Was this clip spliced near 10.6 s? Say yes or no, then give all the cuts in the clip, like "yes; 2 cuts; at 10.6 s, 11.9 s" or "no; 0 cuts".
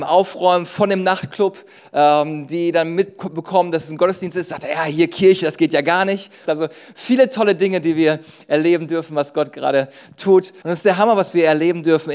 yes; 2 cuts; at 6.5 s, 10.6 s